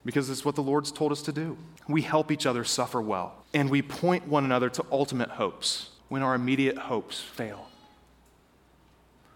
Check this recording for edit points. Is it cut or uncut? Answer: cut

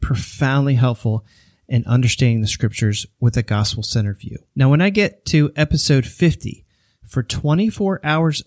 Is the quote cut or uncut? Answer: uncut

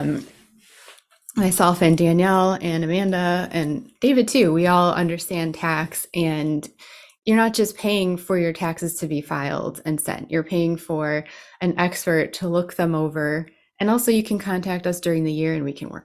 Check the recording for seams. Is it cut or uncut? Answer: uncut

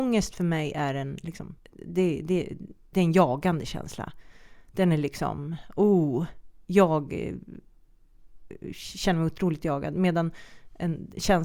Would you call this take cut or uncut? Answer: cut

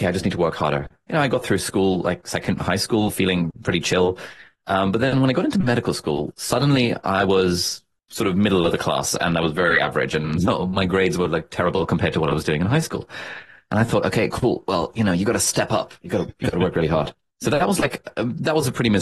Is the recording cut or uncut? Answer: uncut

